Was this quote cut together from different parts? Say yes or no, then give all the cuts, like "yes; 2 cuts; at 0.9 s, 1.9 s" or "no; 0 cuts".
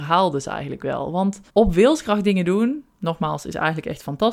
yes; 1 cut; at 1.5 s